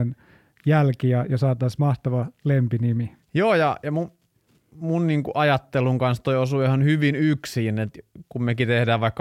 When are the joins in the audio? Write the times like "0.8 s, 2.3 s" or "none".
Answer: 3.2 s